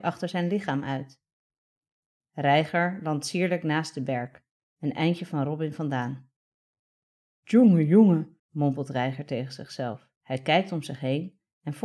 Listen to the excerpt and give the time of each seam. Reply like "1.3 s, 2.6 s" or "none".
8.4 s, 10.2 s